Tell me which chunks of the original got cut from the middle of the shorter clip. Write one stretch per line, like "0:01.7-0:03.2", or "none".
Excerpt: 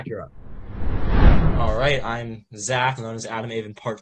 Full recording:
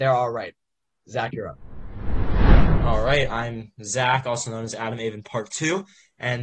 0:04.2-0:04.5